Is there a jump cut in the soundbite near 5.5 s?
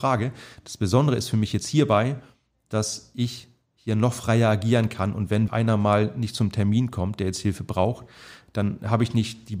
yes; 1 cut; at 5.5 s

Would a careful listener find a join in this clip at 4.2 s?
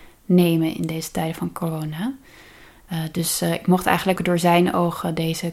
yes; 1 cut; at 4.2 s

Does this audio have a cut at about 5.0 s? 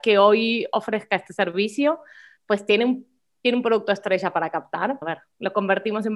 yes; 1 cut; at 5.0 s

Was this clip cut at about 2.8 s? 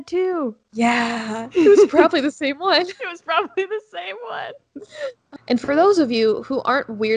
no; 1 cut; at 5.4 s

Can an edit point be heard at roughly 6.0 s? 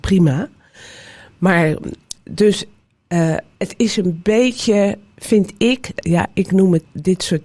yes; 1 cut; at 6.0 s

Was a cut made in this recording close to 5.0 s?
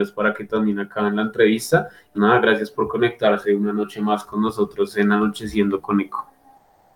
no; 1 cut; at 2.1 s

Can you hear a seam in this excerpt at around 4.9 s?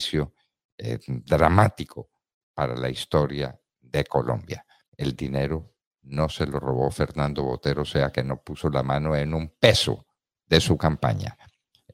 yes; 1 cut; at 4.9 s

